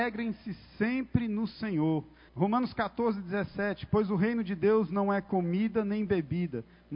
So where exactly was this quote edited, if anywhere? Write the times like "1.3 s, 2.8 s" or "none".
2.3 s